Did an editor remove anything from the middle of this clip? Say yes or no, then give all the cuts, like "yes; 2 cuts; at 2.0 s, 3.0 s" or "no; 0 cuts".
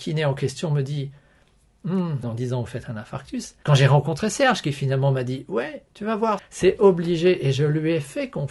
yes; 3 cuts; at 2.2 s, 3.6 s, 6.4 s